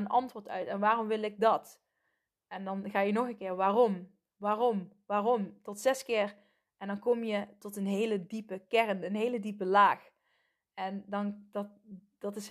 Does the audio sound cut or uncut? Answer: cut